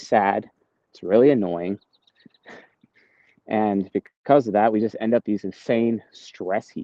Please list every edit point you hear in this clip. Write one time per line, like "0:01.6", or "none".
none

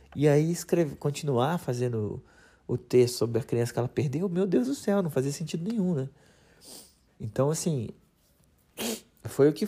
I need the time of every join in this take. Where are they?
0:07.1

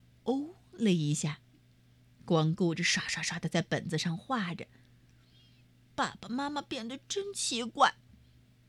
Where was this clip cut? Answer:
none

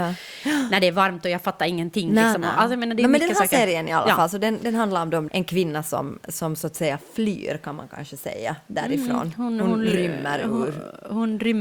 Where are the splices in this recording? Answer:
0:05.3

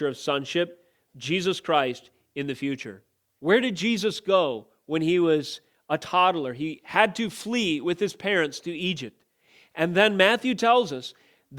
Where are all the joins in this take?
0:01.1
0:03.4

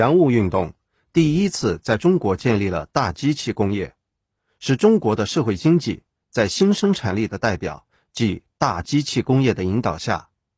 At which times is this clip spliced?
none

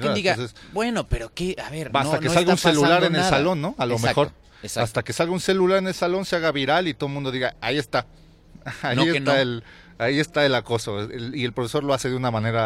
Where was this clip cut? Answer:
none

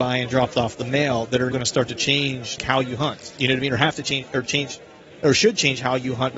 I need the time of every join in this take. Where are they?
0:01.5
0:02.6

